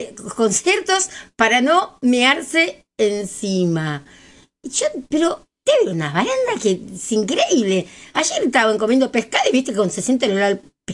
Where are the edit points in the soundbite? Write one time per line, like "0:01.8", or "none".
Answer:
none